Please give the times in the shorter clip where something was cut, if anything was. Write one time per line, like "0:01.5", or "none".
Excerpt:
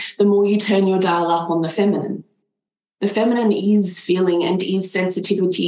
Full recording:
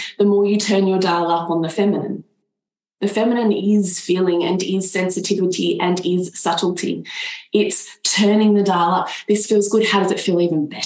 none